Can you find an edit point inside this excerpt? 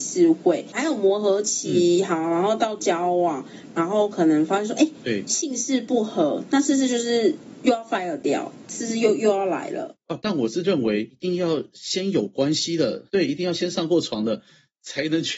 yes; 2 cuts; at 10.2 s, 13.1 s

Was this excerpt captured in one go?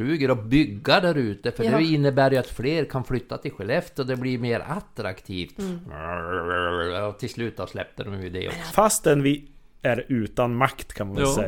no; 1 cut; at 8.7 s

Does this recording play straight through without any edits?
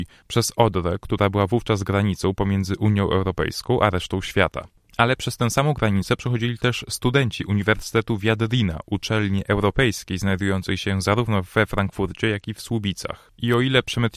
yes; 0 cuts

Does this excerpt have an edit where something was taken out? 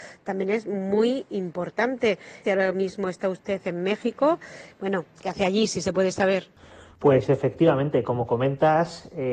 yes; 1 cut; at 2.4 s

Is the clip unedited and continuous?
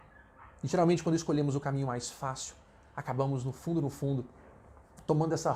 yes; 0 cuts

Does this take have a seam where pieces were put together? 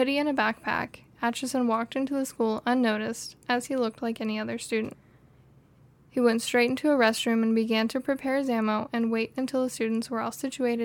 no; 0 cuts

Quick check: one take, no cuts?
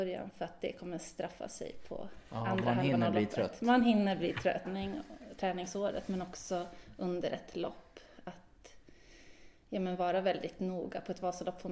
no; 1 cut; at 4.6 s

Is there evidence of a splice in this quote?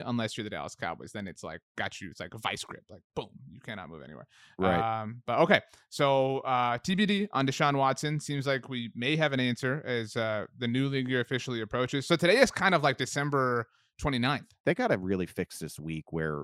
yes; 1 cut; at 14.6 s

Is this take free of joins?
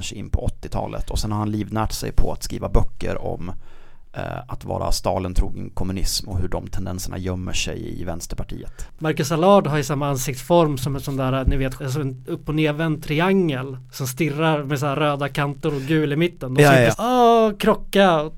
no; 2 cuts; at 11.8 s, 16.9 s

